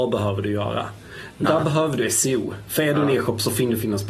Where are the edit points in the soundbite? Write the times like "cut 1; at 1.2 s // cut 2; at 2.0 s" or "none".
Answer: cut 1; at 1.5 s